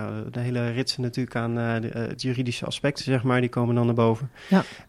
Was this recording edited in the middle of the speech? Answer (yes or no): no